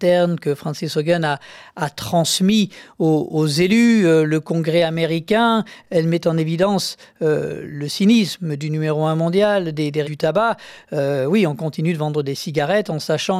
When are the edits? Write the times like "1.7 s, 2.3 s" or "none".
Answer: 5.8 s, 10.0 s